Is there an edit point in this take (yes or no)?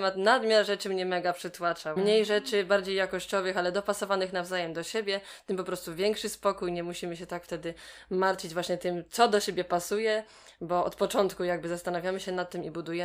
yes